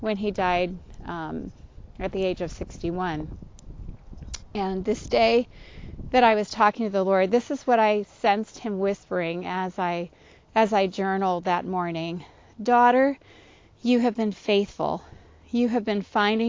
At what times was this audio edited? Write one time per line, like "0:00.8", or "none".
none